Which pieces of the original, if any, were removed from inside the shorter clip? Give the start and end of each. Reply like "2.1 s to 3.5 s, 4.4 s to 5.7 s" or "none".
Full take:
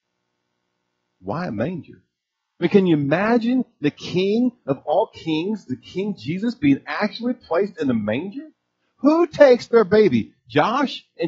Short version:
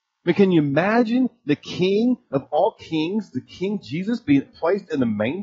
6.8 s to 7.3 s

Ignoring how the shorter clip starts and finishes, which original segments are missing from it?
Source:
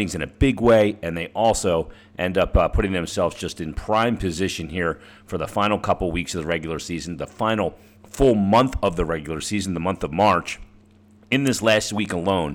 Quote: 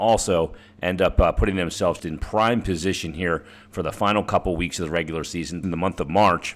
3.4 s to 3.5 s, 7.2 s to 9.7 s

